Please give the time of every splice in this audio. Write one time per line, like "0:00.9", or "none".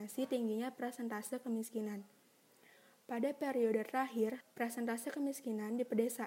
0:04.4